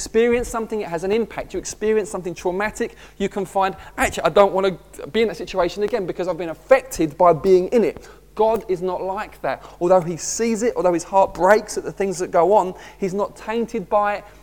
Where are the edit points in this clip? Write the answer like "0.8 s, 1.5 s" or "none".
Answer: none